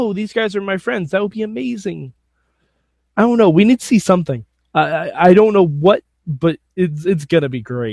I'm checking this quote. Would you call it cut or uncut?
uncut